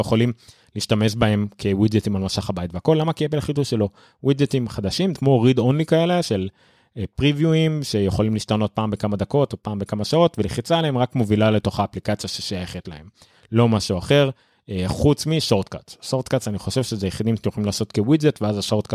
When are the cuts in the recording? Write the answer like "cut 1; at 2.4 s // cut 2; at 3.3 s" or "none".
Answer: cut 1; at 5.2 s